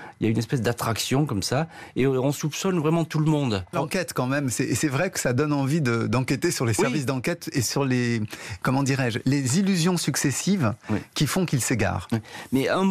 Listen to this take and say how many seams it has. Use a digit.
1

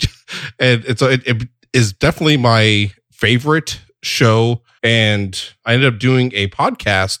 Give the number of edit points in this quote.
1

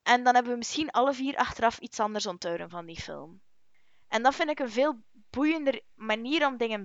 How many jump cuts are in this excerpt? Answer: 1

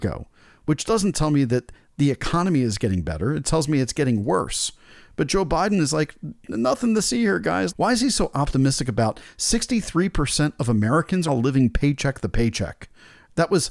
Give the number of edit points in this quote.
2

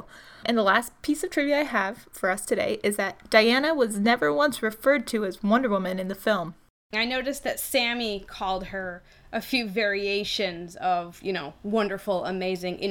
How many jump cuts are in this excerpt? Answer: 1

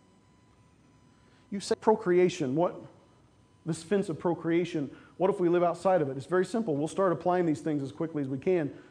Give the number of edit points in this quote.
1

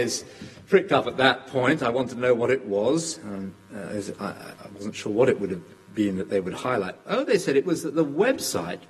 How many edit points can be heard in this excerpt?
0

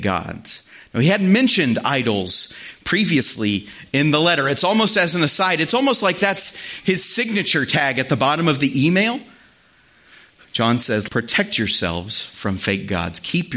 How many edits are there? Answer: 1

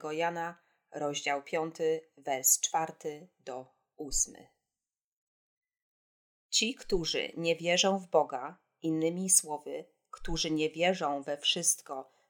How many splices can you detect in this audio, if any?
0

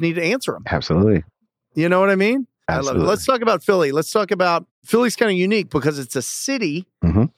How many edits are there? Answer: 1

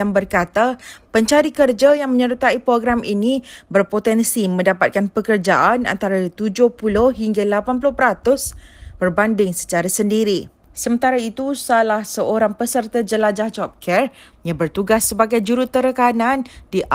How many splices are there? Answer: 2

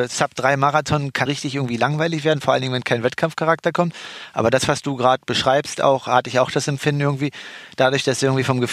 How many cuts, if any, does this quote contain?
1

